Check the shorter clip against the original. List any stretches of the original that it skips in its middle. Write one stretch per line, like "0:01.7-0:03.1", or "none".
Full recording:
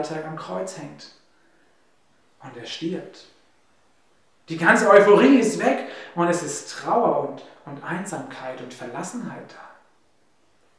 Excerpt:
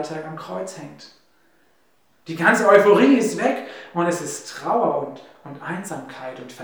0:02.2-0:04.4